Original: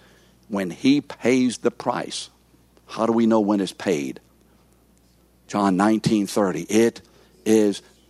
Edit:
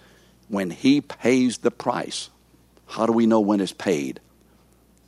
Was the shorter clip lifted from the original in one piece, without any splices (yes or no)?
yes